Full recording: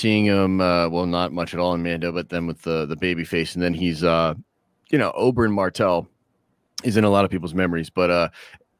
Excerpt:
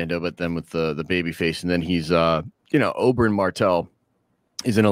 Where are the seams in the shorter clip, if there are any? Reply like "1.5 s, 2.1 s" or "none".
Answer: 2.6 s